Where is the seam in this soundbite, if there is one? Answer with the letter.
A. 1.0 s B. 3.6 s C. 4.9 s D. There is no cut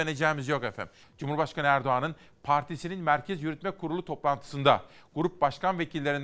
A